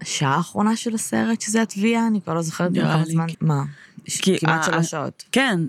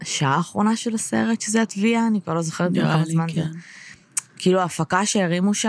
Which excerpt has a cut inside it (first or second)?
first